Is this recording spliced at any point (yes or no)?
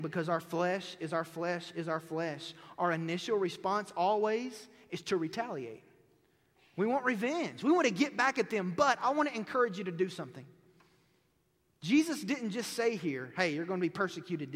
no